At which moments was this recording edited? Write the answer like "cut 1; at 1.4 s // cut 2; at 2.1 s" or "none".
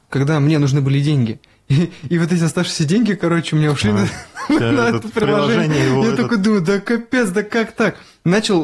none